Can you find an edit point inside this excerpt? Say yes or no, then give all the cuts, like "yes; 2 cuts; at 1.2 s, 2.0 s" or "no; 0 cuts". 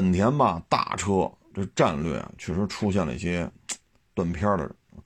no; 0 cuts